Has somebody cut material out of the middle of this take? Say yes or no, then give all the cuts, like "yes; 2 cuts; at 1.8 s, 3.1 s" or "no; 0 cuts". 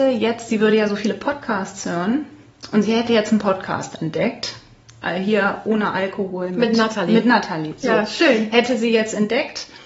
no; 0 cuts